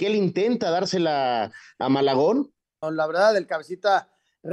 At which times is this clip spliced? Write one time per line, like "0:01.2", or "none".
0:02.8